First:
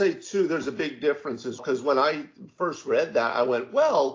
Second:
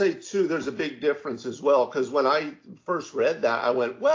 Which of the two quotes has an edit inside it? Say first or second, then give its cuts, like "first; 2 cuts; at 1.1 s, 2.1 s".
first; 1 cut; at 1.6 s